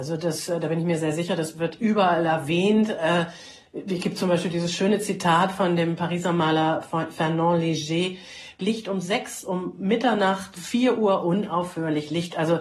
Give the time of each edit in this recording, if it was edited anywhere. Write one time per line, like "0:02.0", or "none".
0:08.6
0:10.6